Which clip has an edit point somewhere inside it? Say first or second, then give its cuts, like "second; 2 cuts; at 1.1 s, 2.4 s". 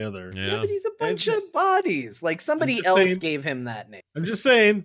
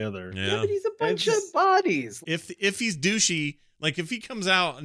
second; 1 cut; at 2.2 s